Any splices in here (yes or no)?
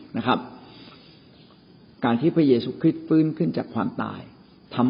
no